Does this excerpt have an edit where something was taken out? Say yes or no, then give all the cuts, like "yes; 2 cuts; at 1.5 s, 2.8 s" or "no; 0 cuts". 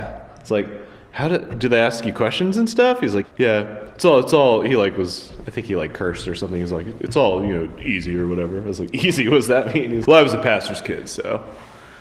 yes; 2 cuts; at 3.2 s, 10.1 s